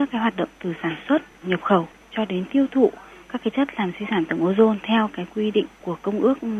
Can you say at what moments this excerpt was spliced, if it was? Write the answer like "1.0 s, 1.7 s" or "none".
1.4 s